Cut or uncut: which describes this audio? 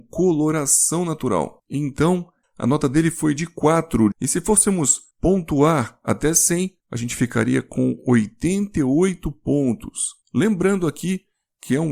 cut